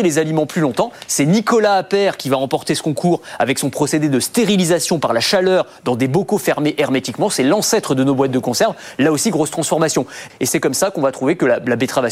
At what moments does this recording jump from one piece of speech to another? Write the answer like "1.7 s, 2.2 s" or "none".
10.3 s